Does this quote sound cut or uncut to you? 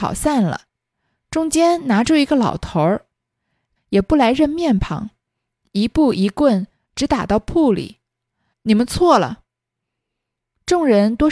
cut